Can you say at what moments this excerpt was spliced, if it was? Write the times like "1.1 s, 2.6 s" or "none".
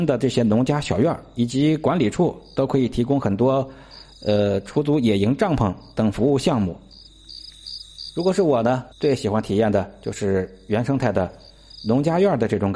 8.9 s